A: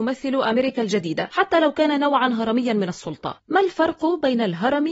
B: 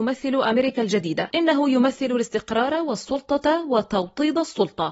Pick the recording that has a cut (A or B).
A